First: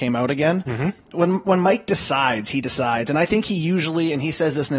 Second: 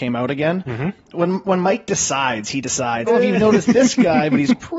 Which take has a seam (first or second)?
second